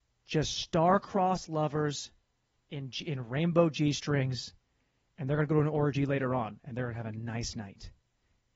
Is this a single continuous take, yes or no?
yes